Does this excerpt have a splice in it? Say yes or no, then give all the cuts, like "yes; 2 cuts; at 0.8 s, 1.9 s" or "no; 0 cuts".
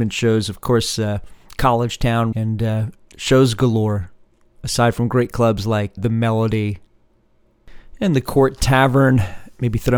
yes; 2 cuts; at 2.3 s, 6.0 s